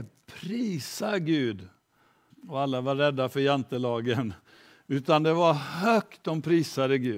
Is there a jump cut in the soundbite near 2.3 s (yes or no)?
yes